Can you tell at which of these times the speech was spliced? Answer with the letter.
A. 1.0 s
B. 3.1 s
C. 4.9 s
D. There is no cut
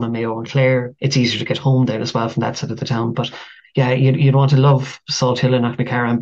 A